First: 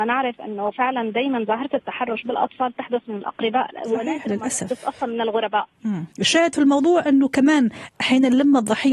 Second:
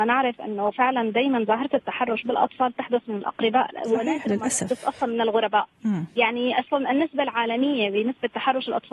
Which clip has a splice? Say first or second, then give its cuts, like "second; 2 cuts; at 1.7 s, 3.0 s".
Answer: first; 1 cut; at 6.1 s